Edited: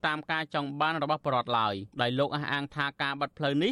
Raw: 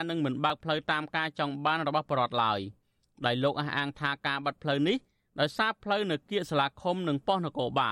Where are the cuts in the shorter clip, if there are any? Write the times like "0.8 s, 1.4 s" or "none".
1.9 s